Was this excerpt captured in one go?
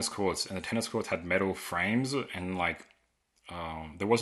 yes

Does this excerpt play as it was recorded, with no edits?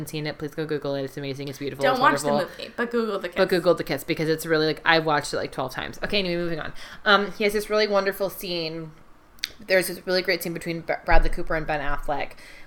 yes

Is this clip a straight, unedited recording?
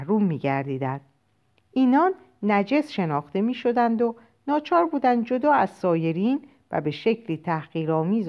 yes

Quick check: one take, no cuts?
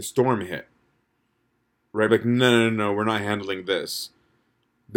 yes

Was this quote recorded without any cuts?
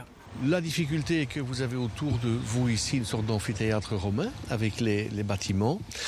yes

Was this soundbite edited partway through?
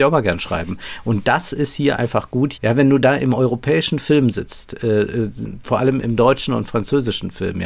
yes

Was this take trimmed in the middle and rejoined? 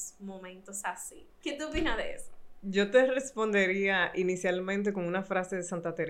yes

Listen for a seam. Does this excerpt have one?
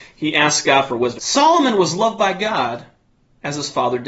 yes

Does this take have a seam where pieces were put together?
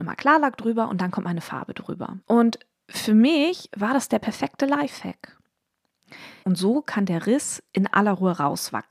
yes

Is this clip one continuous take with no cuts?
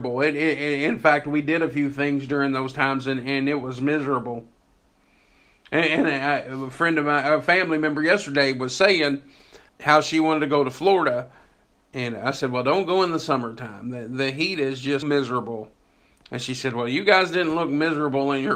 no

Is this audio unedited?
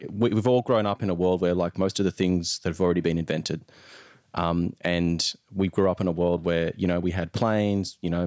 yes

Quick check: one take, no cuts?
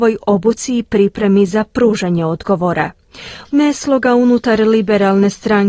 no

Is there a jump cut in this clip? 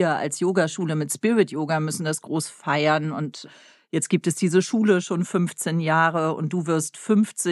no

